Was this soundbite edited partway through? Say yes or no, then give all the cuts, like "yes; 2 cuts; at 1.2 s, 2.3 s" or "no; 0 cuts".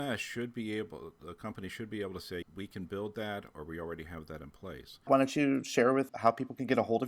yes; 2 cuts; at 2.4 s, 5.1 s